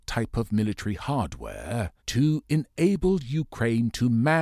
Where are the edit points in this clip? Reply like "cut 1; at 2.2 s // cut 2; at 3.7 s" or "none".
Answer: cut 1; at 2.0 s